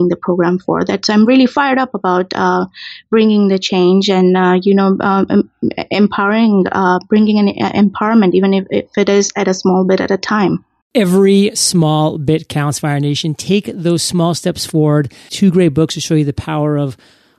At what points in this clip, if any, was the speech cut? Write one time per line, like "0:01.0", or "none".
0:15.3